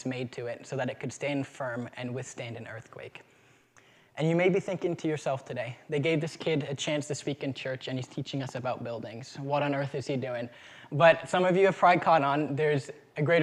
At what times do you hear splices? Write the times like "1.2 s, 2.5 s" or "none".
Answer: none

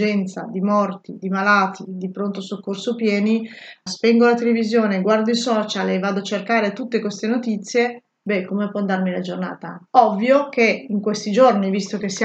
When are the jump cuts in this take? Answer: 3.9 s, 9.9 s

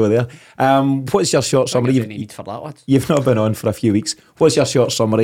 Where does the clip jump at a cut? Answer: none

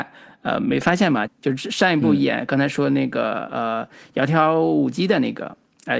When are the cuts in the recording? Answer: 1.3 s

